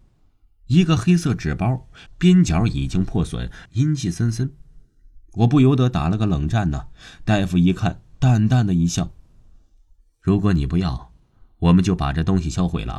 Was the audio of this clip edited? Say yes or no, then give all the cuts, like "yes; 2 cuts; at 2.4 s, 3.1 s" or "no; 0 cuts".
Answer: yes; 2 cuts; at 2.1 s, 3.7 s